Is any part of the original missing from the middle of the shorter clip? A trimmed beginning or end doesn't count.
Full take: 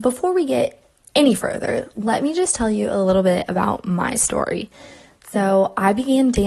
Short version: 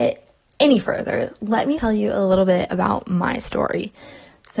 yes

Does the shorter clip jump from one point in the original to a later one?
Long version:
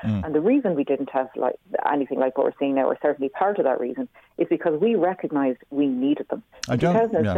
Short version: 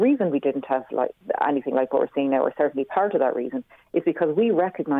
no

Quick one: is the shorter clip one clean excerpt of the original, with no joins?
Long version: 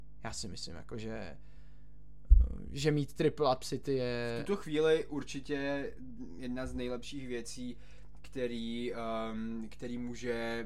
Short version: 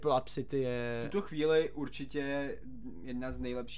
yes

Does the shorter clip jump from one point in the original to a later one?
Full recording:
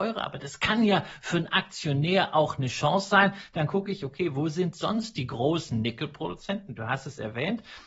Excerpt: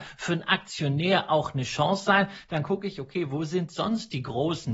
no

